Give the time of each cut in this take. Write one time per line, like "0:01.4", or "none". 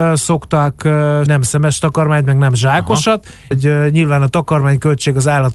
0:01.3
0:03.5